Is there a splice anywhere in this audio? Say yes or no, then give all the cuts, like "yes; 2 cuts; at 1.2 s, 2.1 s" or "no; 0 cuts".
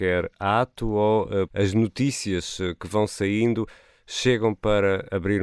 yes; 1 cut; at 1.5 s